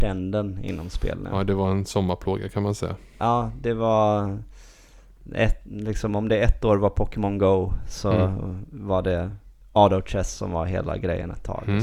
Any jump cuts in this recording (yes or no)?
no